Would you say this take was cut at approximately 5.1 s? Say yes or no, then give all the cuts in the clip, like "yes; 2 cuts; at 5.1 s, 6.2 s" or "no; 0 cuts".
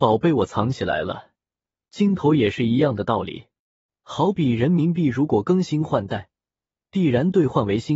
no; 1 cut; at 3.9 s